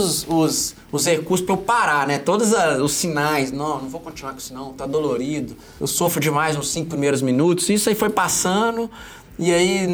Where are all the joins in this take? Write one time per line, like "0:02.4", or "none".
none